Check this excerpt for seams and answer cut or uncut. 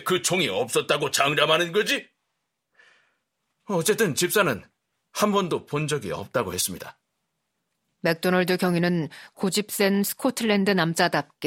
uncut